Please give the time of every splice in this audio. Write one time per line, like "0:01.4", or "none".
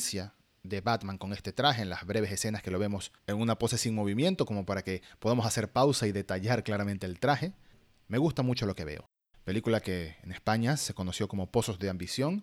0:03.2
0:09.3